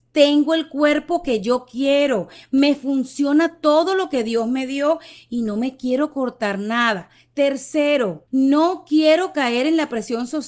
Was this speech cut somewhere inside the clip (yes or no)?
yes